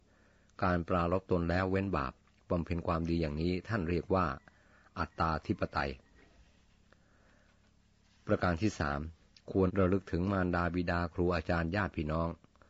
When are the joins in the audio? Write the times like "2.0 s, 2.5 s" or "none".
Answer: 9.7 s